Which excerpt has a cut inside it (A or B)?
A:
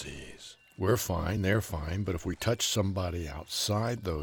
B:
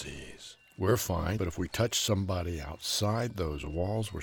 B